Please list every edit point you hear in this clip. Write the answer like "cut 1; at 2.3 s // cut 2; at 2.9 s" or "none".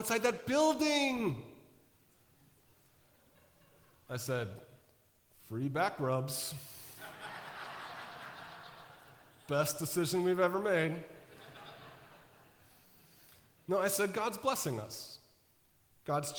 none